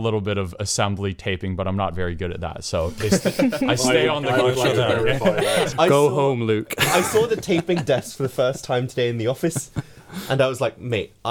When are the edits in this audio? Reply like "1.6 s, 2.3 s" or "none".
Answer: 5.7 s